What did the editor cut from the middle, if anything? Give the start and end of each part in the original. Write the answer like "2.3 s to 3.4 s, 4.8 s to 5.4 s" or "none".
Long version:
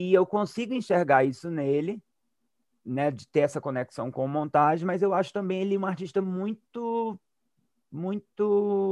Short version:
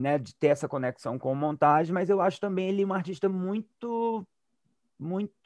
none